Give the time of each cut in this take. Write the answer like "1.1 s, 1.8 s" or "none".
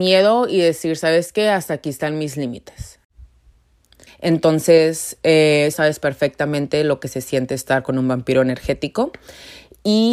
4.1 s, 5.7 s